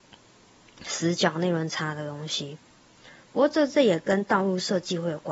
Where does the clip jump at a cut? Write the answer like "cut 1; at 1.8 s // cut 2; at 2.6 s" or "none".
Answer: none